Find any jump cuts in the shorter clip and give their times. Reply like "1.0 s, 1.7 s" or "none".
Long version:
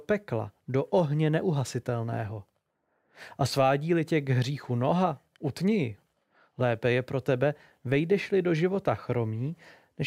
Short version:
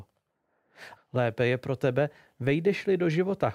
0.9 s